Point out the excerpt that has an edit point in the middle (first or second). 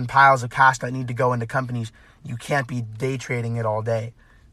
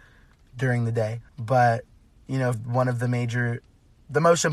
second